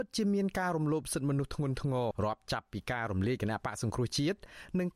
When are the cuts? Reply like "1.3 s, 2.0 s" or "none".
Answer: 2.1 s